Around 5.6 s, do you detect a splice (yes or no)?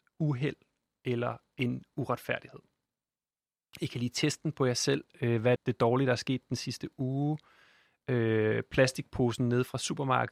yes